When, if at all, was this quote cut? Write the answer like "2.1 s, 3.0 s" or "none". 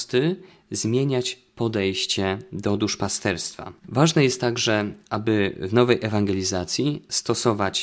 3.8 s

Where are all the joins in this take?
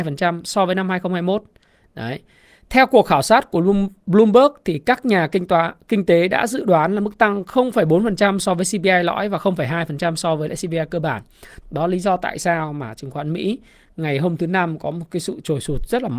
11.6 s

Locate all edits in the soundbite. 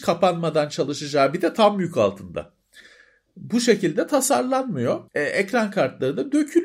5.1 s

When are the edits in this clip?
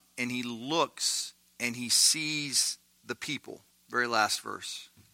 3.7 s

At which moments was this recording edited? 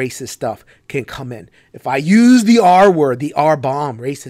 none

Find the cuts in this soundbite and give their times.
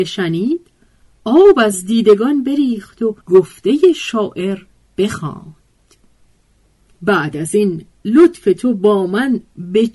3.2 s

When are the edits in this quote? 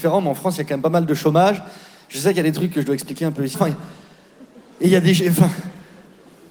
3.5 s

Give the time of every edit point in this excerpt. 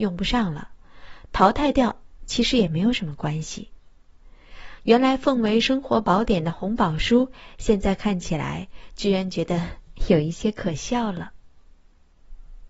4.8 s

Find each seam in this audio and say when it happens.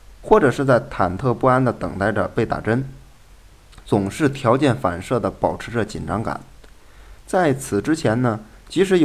7.2 s

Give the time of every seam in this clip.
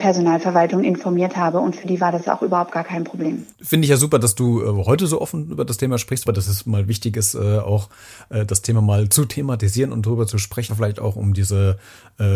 6.3 s, 10.7 s

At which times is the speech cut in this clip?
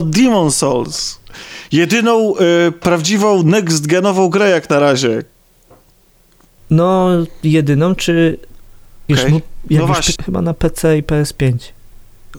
9.1 s, 10.2 s

